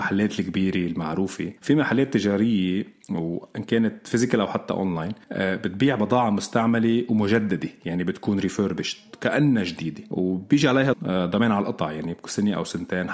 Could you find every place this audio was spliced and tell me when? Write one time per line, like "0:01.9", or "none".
0:10.9